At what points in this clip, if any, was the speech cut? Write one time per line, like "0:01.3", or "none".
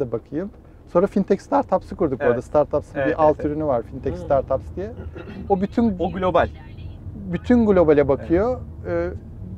none